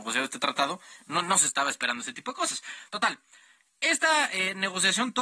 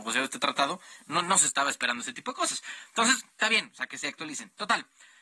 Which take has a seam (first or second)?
first